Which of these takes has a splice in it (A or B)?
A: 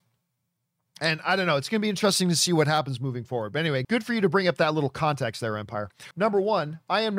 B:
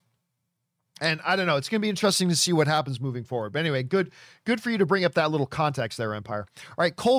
A